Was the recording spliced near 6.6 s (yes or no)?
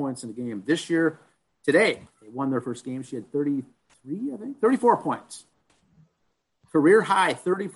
no